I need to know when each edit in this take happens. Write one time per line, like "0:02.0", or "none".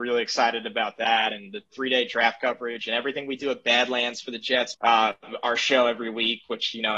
0:04.7